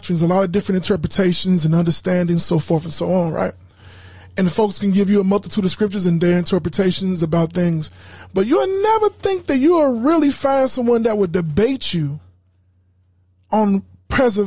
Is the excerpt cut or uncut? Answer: uncut